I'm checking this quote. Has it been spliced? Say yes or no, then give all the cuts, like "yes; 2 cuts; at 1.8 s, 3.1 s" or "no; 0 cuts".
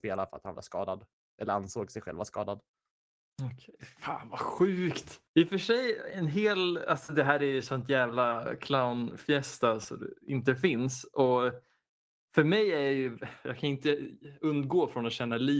yes; 1 cut; at 5.3 s